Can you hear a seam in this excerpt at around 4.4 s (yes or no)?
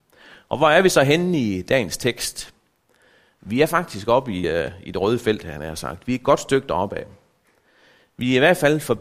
no